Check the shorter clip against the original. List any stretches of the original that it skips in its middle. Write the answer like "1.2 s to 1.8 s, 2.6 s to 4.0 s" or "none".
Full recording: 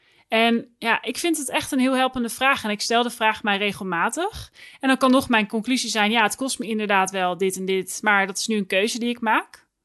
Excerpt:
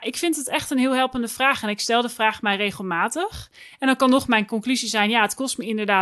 none